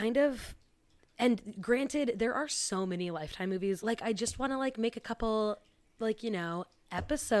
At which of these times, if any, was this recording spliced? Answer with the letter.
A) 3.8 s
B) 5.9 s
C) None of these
A